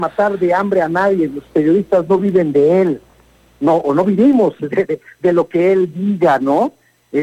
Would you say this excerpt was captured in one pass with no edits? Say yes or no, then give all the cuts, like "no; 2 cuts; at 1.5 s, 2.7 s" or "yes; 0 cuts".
yes; 0 cuts